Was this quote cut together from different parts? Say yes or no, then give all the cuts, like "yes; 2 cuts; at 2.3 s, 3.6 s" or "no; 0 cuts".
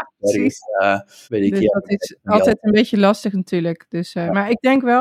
yes; 1 cut; at 1.2 s